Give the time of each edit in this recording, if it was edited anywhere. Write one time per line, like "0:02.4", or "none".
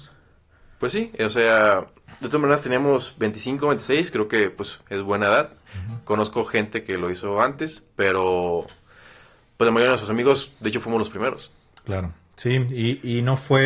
none